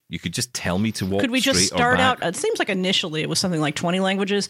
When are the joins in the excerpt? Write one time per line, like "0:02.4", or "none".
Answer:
0:02.2